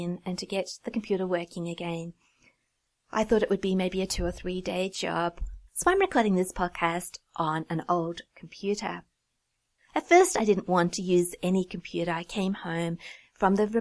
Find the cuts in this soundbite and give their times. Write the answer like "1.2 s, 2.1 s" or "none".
5.7 s